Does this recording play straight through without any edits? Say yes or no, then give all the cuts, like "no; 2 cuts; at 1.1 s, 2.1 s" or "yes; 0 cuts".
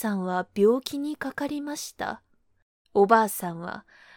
no; 1 cut; at 2.9 s